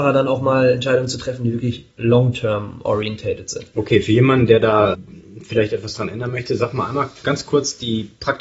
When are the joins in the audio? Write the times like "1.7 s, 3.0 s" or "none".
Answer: none